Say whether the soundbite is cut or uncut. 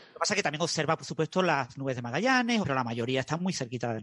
cut